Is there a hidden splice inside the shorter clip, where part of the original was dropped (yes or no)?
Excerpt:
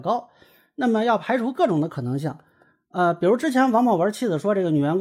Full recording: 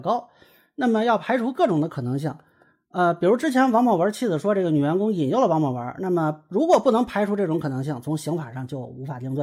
no